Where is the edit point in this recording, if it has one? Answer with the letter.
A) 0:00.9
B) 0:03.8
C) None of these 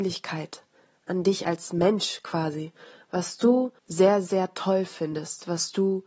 B